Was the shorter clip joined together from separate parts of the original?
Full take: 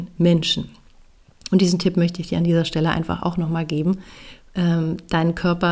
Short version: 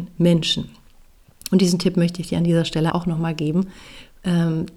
yes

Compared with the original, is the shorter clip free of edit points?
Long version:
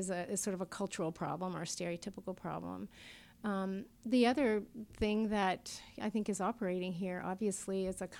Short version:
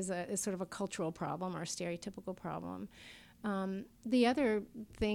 yes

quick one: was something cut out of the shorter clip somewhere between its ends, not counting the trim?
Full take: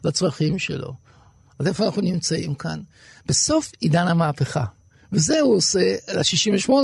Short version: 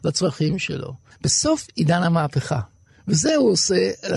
yes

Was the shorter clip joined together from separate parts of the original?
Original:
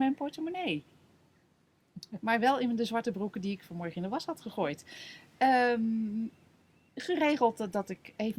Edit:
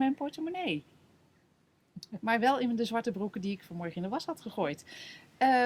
no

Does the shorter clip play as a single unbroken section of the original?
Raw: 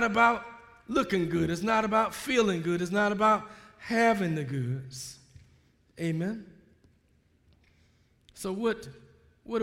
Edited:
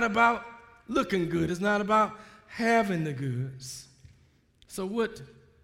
no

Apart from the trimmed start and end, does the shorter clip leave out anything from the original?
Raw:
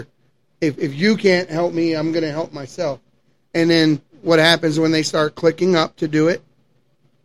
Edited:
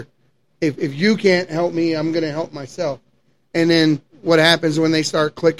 no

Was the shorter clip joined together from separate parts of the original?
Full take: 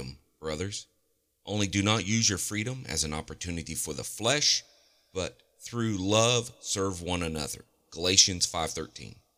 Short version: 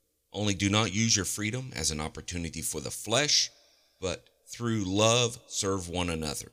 no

